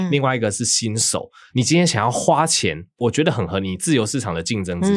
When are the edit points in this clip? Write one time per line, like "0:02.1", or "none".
0:01.5